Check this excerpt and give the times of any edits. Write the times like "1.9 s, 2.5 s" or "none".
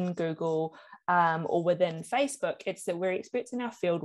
none